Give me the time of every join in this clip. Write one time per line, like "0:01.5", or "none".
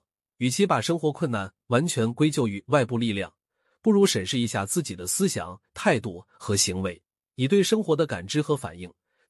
none